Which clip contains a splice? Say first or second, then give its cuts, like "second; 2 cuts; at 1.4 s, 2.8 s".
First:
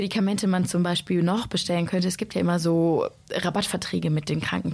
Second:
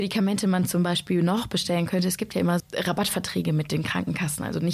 second; 1 cut; at 2.6 s